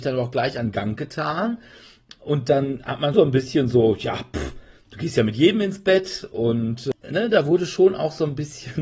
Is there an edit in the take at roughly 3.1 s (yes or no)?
yes